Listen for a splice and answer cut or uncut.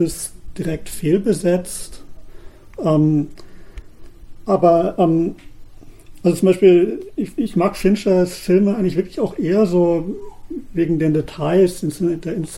cut